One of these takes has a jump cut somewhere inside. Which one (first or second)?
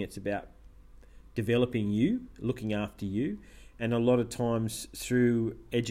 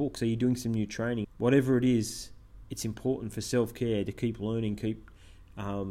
second